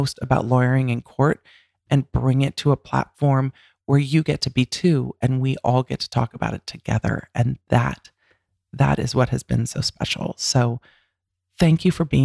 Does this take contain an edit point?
no; 0 cuts

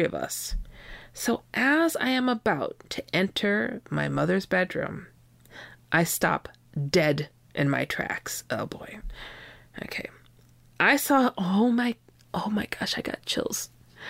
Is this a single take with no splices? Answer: yes; 0 cuts

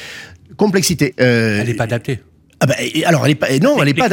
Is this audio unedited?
no; 1 cut; at 1.1 s

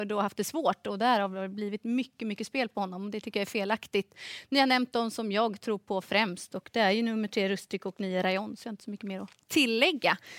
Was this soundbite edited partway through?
no; 0 cuts

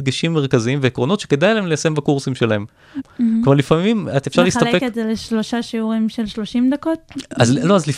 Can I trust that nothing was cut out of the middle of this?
no; 1 cut; at 3.0 s

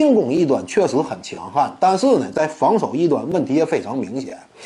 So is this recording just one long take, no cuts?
yes; 0 cuts

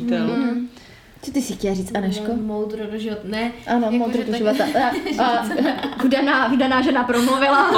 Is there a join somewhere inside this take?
no; 0 cuts

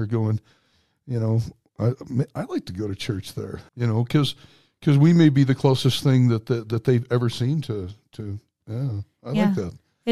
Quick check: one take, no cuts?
no; 1 cut; at 3.7 s

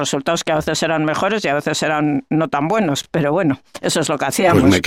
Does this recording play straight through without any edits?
yes; 0 cuts

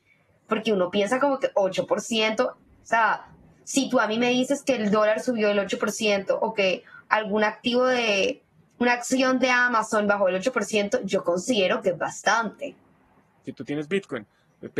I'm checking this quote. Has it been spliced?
yes; 1 cut; at 13.4 s

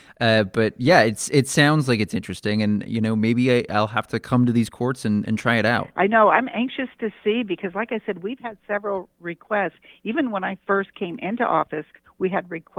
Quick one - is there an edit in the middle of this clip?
no; 0 cuts

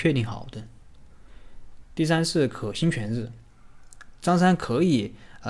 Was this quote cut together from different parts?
yes; 1 cut; at 1.8 s

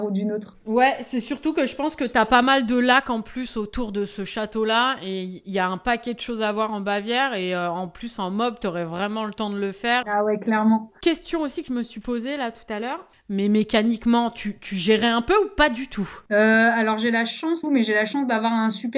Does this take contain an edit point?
yes; 2 cuts; at 10.0 s, 17.6 s

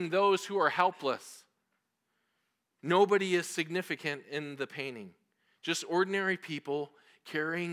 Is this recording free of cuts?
yes; 0 cuts

